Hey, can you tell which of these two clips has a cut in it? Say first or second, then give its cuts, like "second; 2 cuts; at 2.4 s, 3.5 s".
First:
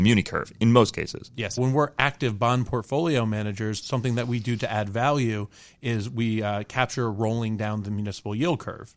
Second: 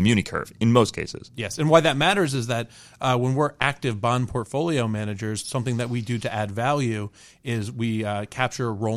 first; 1 cut; at 1.6 s